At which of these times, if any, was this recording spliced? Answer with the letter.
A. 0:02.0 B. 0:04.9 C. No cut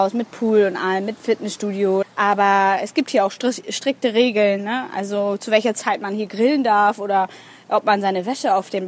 A